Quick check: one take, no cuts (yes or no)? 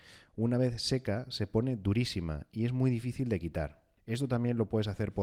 no